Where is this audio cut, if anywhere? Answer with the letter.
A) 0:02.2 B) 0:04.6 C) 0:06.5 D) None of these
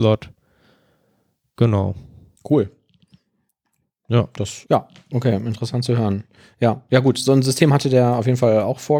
B